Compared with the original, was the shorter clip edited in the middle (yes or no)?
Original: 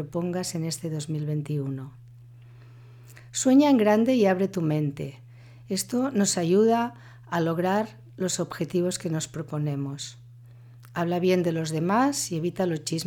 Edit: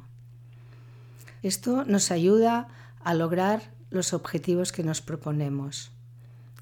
yes